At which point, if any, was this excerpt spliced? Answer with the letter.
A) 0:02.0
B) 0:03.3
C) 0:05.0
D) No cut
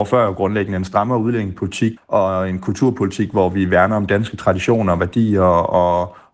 A